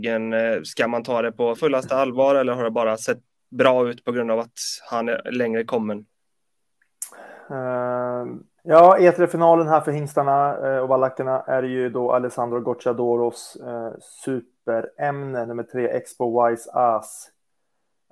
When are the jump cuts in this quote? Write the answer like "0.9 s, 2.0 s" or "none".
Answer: 1.6 s, 8.6 s